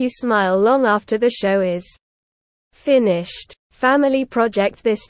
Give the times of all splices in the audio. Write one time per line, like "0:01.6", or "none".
0:03.6